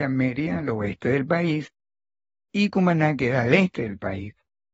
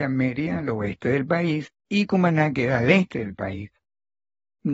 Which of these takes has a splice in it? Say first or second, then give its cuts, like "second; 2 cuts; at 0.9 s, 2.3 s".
second; 1 cut; at 1.8 s